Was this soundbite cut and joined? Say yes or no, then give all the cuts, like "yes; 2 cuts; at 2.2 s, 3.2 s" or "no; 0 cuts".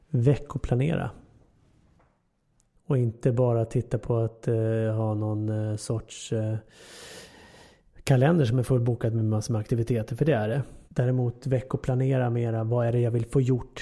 yes; 2 cuts; at 2.7 s, 10.9 s